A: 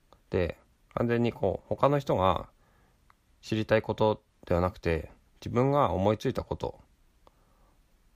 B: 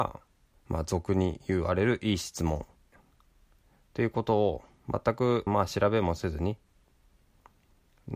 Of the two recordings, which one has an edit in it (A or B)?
B